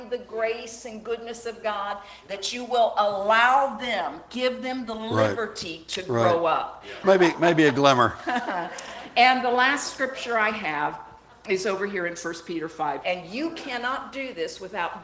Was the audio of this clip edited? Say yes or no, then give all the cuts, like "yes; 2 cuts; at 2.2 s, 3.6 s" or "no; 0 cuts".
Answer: yes; 2 cuts; at 7.0 s, 13.0 s